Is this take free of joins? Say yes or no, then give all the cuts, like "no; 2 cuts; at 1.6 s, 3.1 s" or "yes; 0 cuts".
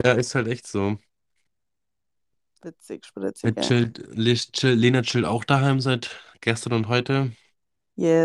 yes; 0 cuts